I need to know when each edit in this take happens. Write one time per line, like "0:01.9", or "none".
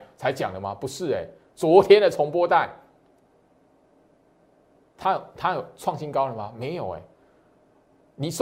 none